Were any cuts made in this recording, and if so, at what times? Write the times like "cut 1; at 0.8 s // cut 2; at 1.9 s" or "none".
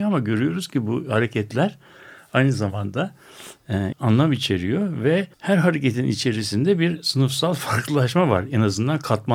cut 1; at 3.9 s // cut 2; at 5.3 s